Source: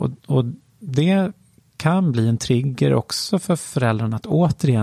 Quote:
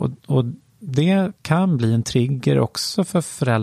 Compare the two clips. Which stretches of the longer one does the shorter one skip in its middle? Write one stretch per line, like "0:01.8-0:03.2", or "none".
0:01.4-0:01.7